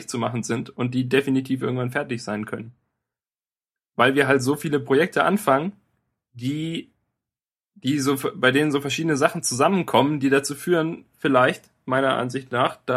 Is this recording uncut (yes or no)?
yes